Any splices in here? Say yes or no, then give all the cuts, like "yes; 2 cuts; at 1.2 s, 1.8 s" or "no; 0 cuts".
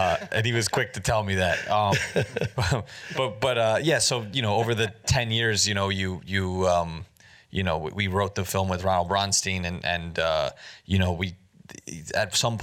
no; 0 cuts